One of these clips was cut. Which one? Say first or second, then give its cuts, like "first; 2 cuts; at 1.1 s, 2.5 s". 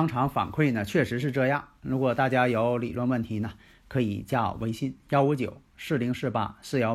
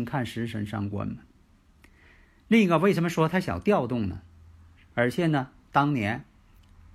second; 1 cut; at 4.9 s